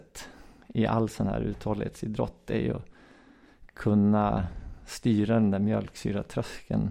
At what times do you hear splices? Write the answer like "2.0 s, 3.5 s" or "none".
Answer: none